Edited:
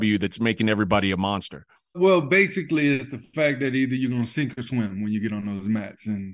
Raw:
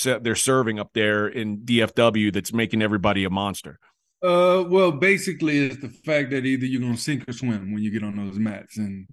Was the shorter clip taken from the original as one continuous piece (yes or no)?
no